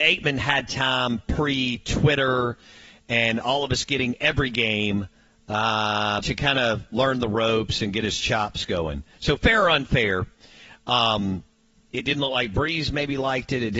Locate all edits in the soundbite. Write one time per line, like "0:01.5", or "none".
0:06.2